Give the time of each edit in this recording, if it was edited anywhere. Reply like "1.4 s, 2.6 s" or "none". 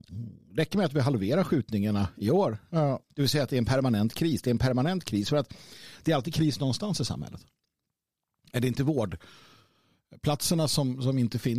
3.0 s